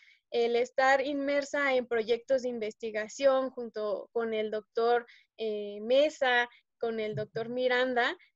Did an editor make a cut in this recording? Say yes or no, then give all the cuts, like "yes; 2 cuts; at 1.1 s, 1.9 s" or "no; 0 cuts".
no; 0 cuts